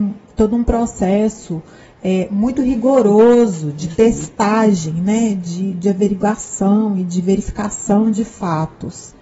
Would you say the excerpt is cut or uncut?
uncut